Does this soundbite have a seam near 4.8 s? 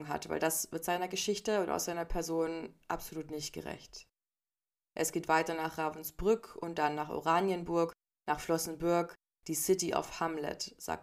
yes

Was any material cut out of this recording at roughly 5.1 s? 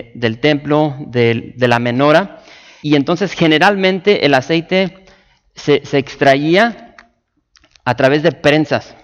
no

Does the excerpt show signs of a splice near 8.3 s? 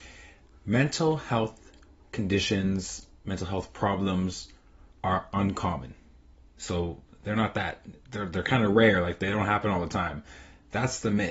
no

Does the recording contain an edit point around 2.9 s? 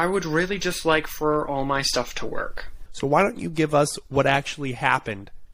yes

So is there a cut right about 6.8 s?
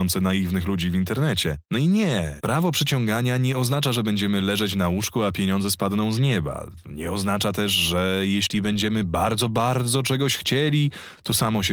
no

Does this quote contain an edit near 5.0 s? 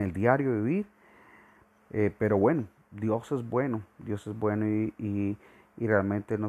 no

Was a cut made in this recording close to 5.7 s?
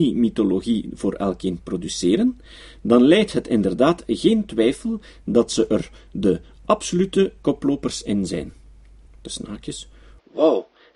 no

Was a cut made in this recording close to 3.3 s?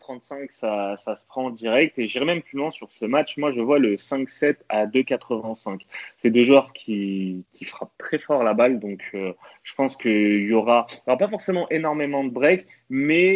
no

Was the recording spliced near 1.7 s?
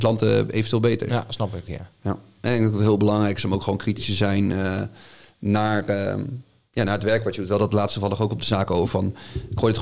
yes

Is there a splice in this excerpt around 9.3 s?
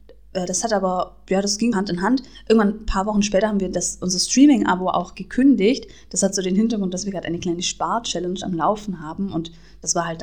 no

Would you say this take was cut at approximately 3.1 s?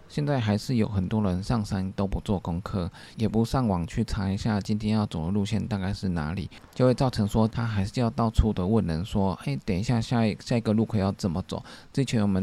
no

